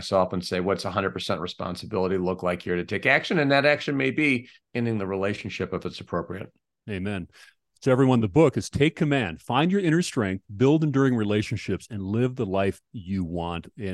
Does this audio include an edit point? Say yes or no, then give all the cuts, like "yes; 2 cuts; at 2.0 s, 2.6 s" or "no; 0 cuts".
no; 0 cuts